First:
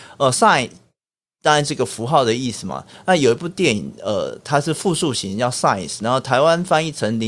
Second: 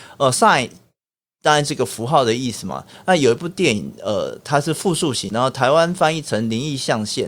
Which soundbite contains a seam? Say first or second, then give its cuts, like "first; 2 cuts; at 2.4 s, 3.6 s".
second; 1 cut; at 5.3 s